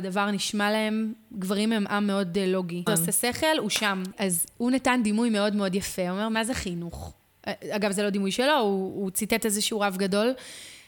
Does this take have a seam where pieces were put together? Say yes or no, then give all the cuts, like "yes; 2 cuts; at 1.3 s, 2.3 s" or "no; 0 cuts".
yes; 2 cuts; at 2.9 s, 4.1 s